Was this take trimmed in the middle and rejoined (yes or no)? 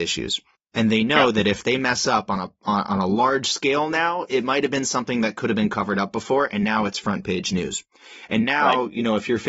no